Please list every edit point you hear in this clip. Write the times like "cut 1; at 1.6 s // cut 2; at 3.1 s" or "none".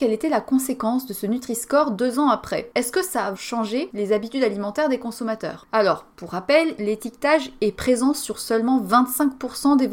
cut 1; at 3.3 s // cut 2; at 6.8 s